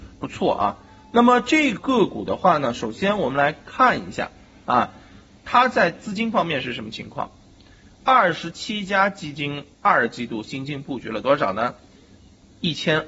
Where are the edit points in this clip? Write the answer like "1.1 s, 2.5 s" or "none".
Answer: 1.8 s